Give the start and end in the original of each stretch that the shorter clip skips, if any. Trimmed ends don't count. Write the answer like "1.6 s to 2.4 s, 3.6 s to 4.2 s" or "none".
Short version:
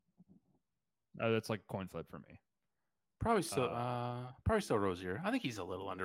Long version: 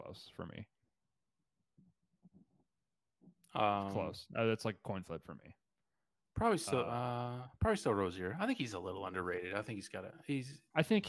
3.2 s to 4.3 s